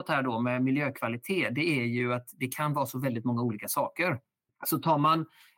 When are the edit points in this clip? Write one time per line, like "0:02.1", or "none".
0:04.5